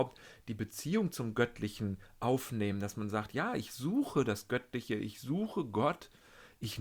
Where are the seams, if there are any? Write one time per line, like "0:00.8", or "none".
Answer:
none